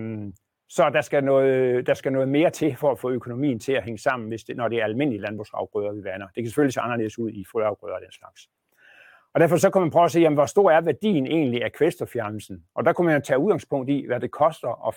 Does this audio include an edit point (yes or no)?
no